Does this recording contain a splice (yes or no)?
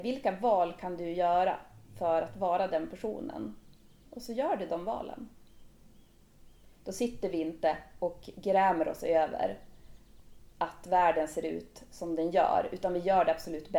yes